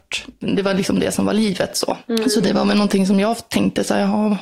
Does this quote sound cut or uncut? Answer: uncut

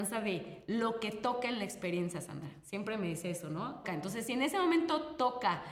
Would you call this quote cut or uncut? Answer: cut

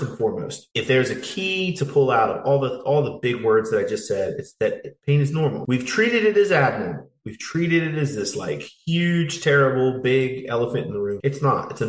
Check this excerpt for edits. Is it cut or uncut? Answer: uncut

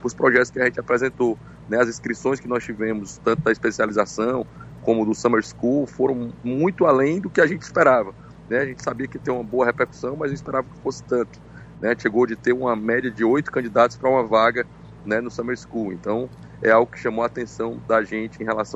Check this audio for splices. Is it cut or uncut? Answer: uncut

